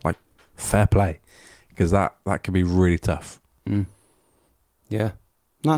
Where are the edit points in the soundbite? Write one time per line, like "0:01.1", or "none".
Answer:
none